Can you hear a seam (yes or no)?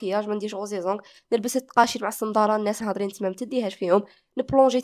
yes